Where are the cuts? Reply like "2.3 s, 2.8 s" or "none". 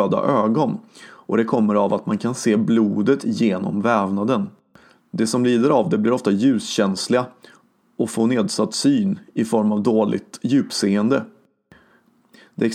none

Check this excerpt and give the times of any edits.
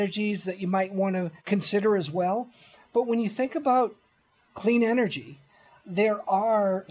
1.4 s

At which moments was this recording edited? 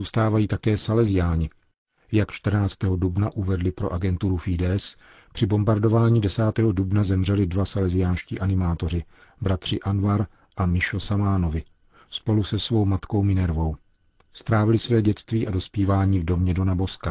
none

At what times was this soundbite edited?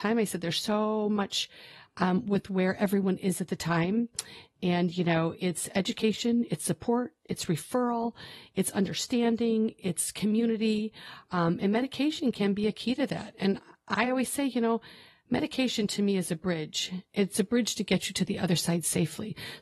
none

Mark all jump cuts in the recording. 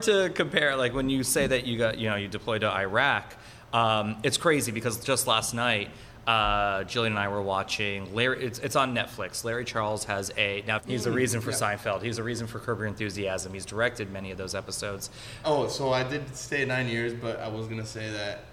10.8 s, 15.4 s

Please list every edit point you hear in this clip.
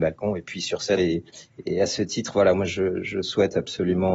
1.0 s

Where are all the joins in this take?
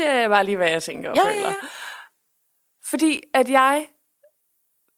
none

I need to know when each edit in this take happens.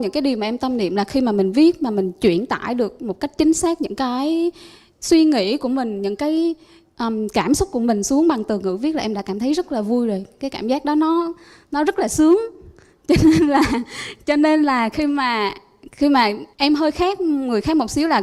16.5 s

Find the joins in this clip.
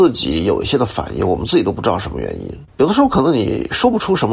2.7 s

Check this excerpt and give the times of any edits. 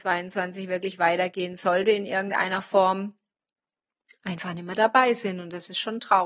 none

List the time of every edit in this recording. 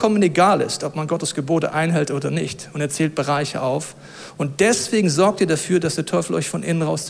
none

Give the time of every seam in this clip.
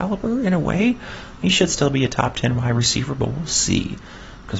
1.4 s

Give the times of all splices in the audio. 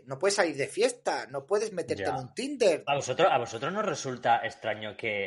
2.9 s

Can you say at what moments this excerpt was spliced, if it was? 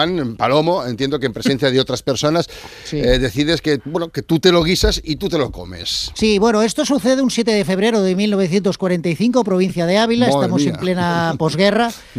none

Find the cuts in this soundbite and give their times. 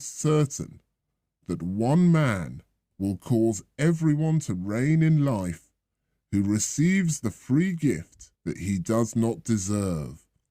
2.9 s, 8.4 s

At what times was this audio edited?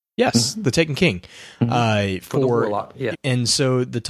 3.1 s

